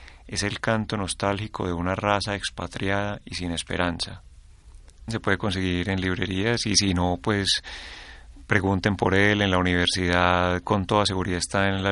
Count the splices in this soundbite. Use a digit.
1